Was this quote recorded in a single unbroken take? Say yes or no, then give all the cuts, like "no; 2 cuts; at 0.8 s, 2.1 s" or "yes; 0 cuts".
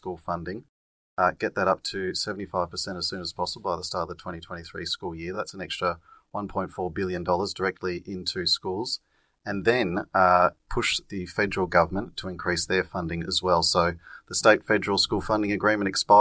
yes; 0 cuts